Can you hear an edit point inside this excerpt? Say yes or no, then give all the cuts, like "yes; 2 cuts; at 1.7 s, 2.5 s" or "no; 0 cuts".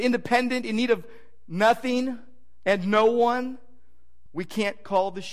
yes; 1 cut; at 4.3 s